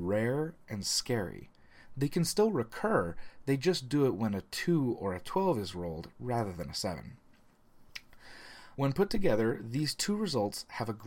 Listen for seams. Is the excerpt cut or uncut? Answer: cut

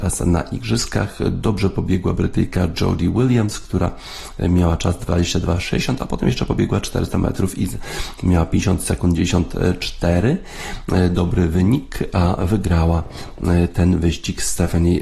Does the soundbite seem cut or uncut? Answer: uncut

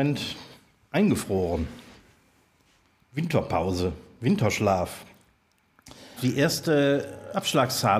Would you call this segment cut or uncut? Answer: cut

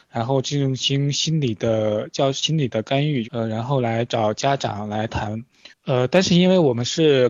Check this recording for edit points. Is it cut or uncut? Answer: cut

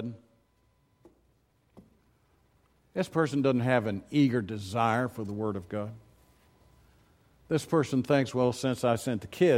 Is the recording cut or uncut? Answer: uncut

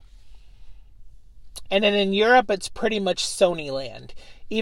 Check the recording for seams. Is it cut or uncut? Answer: cut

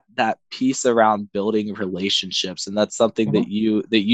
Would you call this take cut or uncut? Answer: uncut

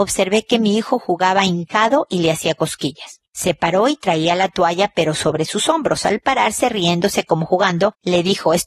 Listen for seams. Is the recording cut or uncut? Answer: uncut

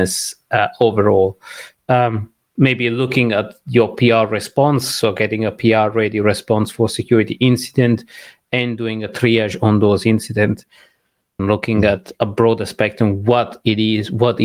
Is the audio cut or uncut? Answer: cut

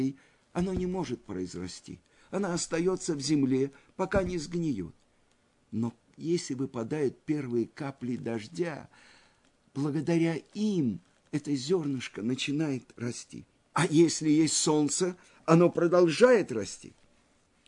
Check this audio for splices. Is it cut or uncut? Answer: cut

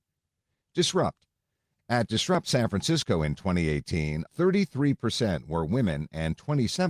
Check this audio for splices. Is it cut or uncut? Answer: cut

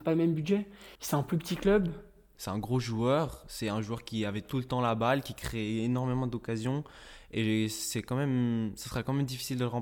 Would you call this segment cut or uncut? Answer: cut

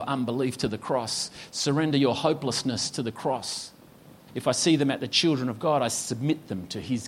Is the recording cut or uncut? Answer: cut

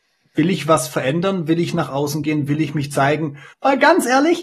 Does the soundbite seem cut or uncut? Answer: cut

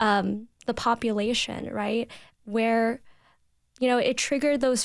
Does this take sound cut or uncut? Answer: uncut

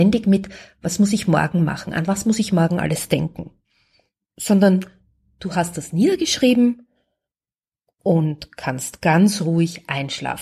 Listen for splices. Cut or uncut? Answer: uncut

